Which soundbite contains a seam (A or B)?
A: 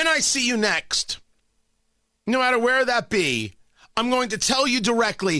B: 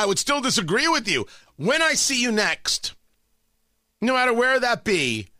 B